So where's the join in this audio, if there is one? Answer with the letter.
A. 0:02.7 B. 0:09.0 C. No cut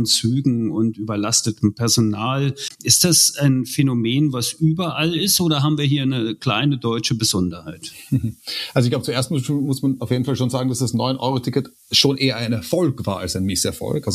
A